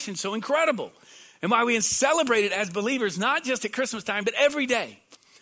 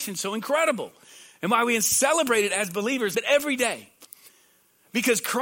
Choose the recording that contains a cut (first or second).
second